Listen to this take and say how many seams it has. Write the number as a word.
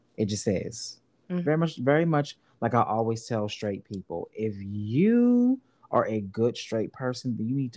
one